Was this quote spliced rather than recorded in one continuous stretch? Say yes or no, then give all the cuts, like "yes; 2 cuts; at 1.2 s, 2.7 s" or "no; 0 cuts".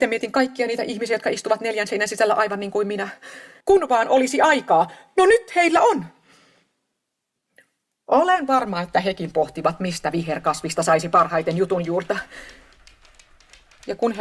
yes; 1 cut; at 3.6 s